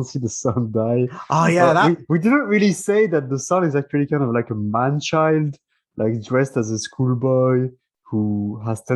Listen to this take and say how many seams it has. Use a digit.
0